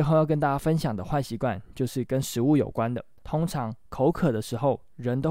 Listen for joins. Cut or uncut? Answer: cut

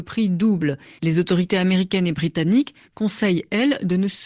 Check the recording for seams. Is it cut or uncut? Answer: cut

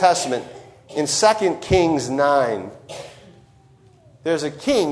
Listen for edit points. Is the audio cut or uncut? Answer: uncut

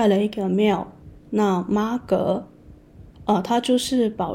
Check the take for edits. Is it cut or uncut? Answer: cut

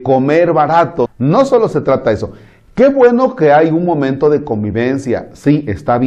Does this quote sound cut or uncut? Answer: cut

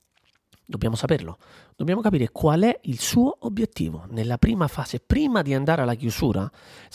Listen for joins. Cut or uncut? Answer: uncut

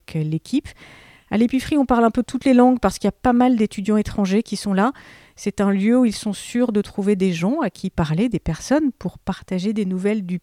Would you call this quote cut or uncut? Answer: uncut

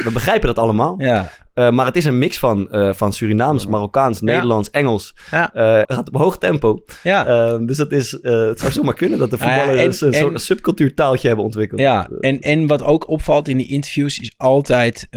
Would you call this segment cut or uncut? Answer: cut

